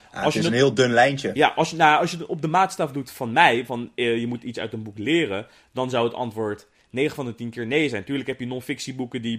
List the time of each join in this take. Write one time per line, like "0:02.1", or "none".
none